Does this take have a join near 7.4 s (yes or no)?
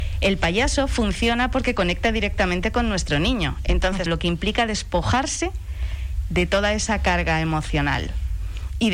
no